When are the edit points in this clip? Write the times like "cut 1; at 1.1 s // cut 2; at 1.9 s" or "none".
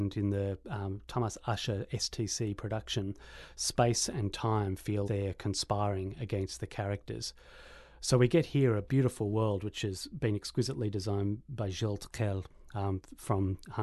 cut 1; at 5.0 s